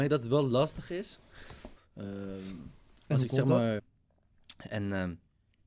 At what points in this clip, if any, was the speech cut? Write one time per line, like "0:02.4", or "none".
0:01.8
0:03.8